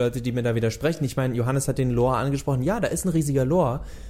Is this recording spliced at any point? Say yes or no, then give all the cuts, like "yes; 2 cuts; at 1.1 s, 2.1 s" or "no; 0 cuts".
no; 0 cuts